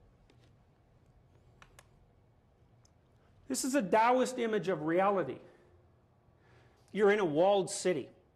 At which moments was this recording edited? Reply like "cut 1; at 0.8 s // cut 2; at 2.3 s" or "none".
cut 1; at 3.4 s // cut 2; at 6.8 s